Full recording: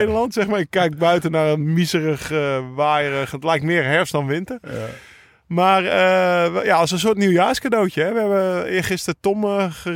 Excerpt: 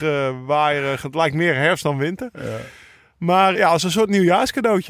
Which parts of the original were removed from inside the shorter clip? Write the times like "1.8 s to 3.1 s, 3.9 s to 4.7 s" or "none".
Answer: 5.8 s to 6.6 s